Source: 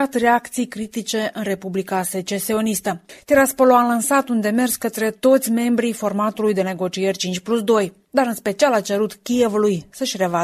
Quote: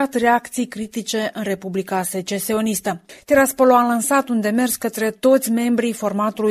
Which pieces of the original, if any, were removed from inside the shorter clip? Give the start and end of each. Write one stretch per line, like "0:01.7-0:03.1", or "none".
none